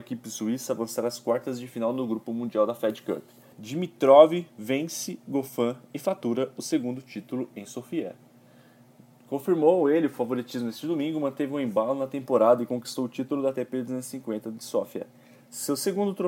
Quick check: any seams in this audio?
yes; 1 cut; at 3.5 s

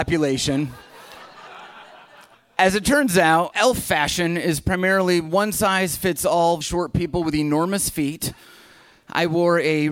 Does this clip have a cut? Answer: yes; 3 cuts; at 2.3 s, 3.5 s, 6.6 s

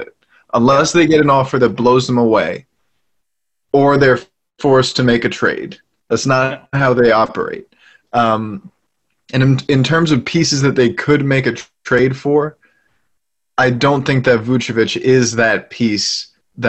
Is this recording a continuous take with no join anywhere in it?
no; 1 cut; at 6.0 s

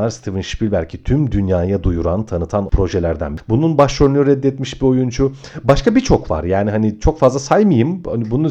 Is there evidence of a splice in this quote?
yes; 1 cut; at 3.4 s

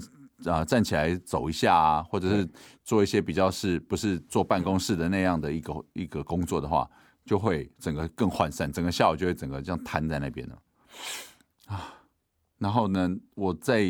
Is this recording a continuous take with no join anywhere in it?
yes; 0 cuts

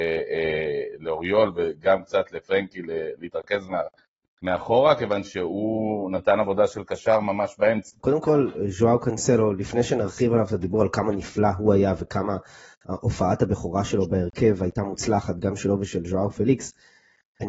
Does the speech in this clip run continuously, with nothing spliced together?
no; 1 cut; at 8.0 s

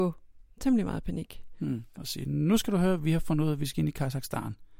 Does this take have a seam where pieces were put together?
yes; 1 cut; at 1.9 s

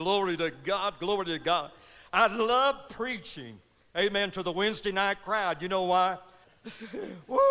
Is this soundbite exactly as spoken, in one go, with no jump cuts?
no; 1 cut; at 6.4 s

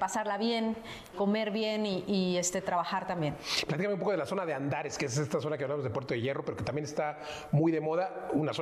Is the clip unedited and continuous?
no; 1 cut; at 1.1 s

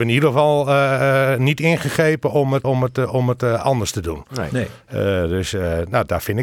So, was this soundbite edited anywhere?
yes; 1 cut; at 2.6 s

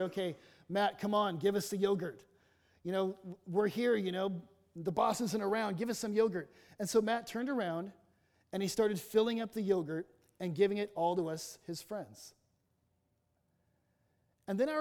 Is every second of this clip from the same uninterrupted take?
yes; 0 cuts

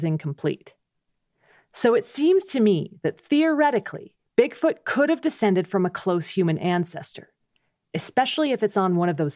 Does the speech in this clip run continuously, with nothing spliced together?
yes; 0 cuts

